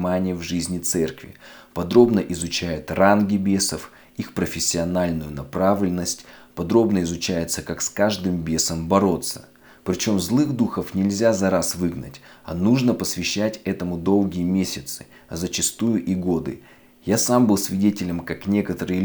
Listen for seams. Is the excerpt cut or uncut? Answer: uncut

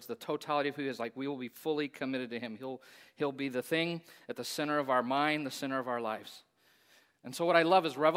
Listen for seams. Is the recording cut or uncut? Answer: uncut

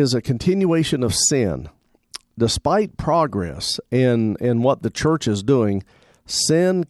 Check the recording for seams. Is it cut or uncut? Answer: uncut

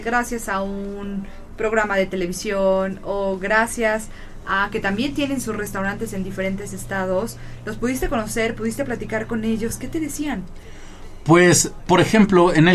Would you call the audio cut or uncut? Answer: cut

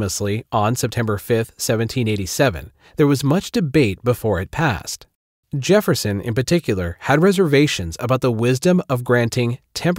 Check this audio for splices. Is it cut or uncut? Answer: uncut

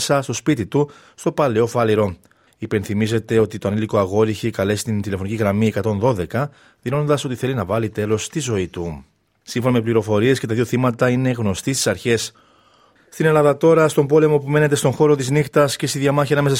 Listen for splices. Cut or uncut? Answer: cut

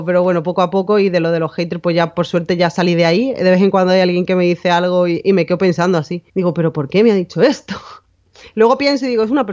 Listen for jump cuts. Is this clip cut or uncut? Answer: cut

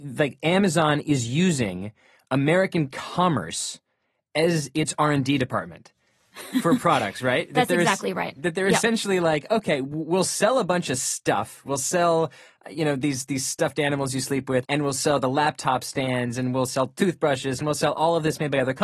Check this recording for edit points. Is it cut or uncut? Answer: cut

